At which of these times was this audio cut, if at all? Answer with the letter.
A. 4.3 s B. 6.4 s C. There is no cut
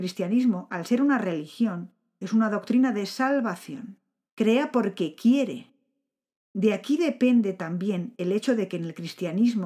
A